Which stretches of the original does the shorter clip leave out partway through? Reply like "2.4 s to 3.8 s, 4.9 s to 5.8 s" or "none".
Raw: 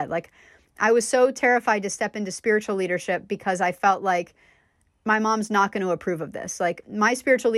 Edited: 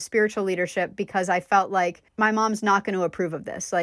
4.4 s to 5.0 s